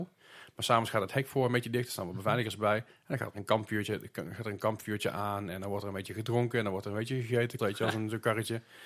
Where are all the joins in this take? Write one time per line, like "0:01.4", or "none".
0:07.6